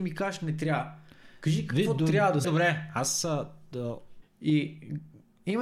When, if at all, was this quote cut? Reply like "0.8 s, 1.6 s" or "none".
2.4 s, 4.2 s

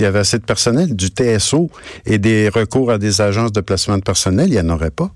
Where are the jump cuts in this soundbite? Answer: none

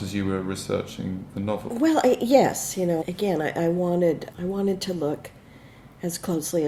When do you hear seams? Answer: 1.7 s, 3.0 s, 4.3 s

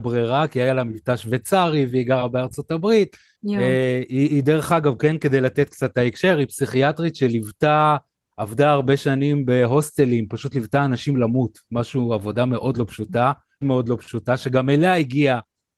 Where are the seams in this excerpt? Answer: 3.3 s, 13.6 s

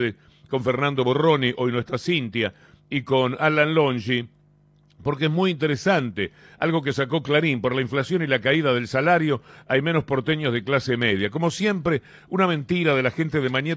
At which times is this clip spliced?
none

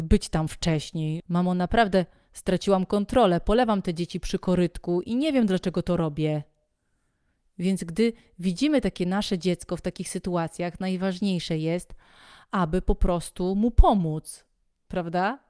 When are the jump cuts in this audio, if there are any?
1.2 s

